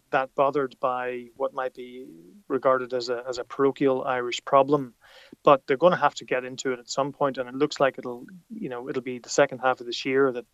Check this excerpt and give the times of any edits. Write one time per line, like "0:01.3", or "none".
none

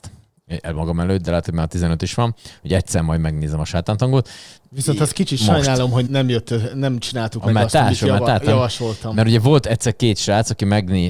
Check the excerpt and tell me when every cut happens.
0:06.1

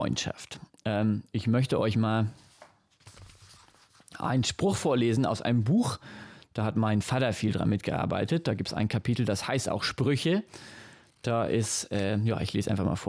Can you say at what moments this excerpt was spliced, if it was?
none

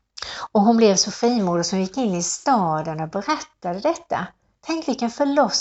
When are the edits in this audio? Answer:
none

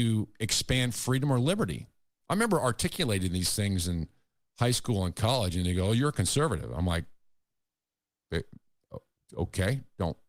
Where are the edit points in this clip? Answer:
0:02.2
0:09.2

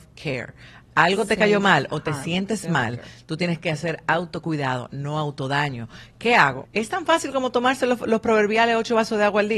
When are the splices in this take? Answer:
0:06.7

